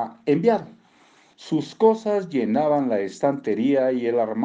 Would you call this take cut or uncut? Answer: cut